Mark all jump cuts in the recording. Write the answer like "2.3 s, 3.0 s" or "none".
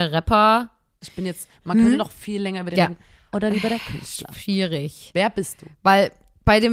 1.0 s, 3.3 s